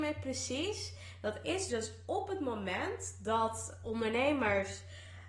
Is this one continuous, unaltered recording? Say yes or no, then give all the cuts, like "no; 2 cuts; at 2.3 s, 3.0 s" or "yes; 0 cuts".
no; 1 cut; at 1.7 s